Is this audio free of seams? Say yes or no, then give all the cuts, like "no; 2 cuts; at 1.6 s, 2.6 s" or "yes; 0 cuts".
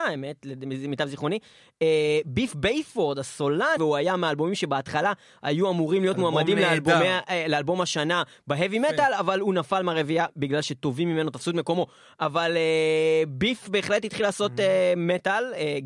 no; 1 cut; at 3.8 s